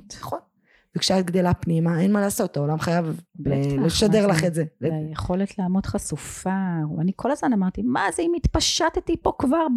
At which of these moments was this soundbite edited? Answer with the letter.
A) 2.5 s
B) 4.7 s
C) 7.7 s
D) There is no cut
D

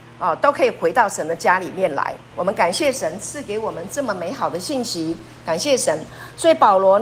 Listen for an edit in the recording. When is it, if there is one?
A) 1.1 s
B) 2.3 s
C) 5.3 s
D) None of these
B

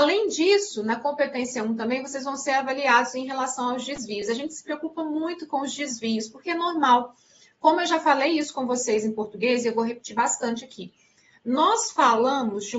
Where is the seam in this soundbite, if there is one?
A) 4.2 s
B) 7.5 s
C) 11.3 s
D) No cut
D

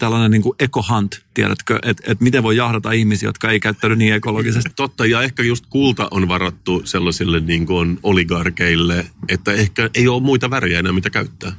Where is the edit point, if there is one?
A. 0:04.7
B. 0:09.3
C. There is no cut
A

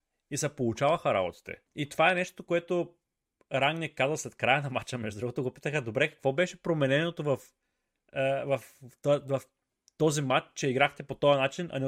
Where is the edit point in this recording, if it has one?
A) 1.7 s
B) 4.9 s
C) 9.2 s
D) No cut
A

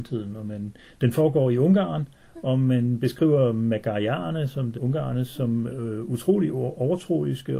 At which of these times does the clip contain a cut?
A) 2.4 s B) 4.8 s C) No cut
B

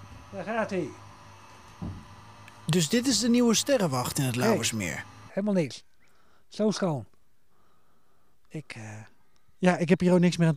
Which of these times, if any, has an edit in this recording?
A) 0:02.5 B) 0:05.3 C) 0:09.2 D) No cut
B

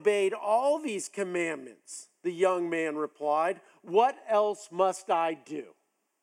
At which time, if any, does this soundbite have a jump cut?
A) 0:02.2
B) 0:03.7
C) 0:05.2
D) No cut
D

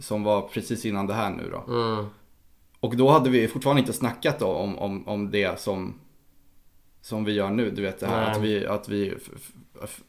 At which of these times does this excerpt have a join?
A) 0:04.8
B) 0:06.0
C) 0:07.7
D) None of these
D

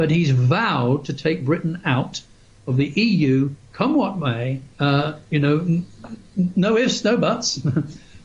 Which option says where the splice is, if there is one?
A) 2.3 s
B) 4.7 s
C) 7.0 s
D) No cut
B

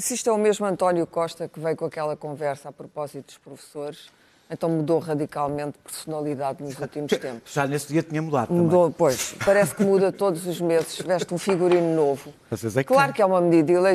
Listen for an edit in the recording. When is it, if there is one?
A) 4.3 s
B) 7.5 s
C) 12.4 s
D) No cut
D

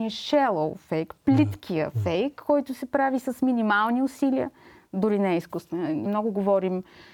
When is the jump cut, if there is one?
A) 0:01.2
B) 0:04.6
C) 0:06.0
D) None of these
C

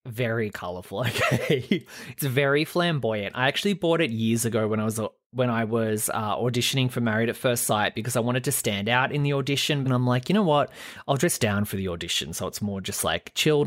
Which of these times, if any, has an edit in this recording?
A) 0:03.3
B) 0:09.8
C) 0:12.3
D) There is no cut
B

